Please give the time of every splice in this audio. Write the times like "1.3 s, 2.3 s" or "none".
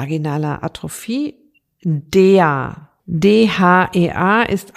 none